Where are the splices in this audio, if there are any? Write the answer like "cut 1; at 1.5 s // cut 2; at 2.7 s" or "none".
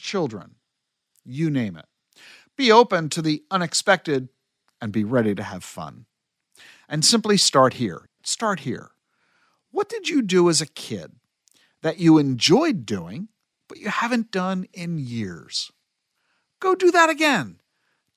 cut 1; at 8.2 s

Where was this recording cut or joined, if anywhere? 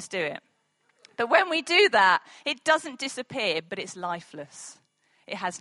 cut 1; at 3.7 s

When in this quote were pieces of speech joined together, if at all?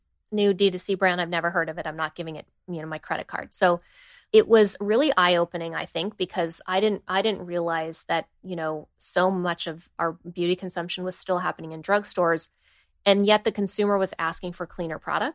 none

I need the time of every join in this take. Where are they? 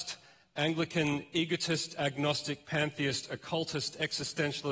none

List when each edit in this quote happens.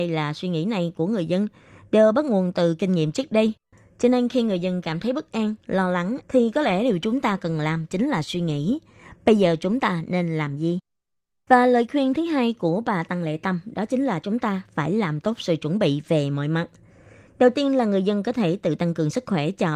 cut 1; at 6.2 s

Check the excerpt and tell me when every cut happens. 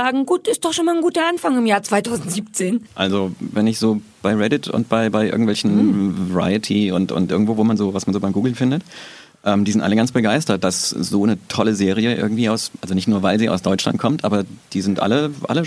cut 1; at 2.9 s

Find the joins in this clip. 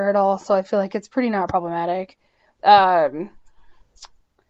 cut 1; at 2.6 s

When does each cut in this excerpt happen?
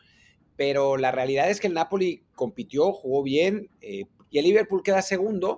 cut 1; at 4.2 s

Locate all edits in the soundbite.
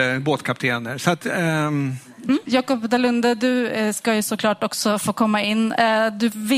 cut 1; at 2.5 s

